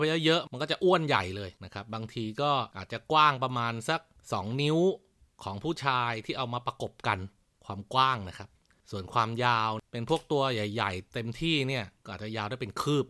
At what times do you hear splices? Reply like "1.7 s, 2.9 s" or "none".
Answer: none